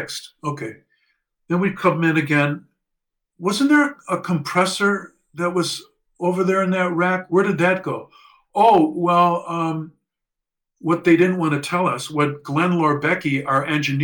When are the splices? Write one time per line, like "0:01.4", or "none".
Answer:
none